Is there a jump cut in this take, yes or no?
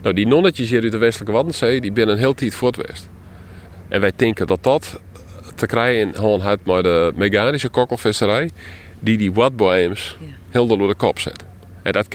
no